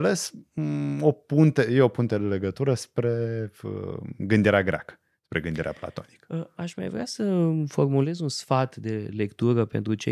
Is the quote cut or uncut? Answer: uncut